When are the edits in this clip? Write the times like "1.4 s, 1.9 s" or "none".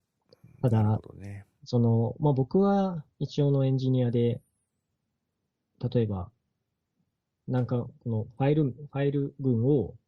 none